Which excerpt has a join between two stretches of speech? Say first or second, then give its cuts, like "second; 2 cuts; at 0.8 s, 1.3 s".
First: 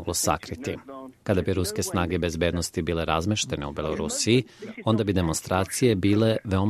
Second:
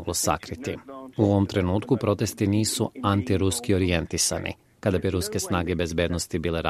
first; 1 cut; at 1.1 s